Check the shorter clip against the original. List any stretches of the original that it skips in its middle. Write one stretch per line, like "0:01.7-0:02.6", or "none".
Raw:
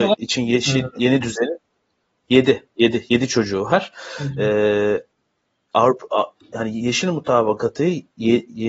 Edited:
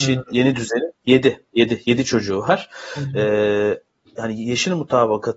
0:01.6-0:02.2
0:05.3-0:06.4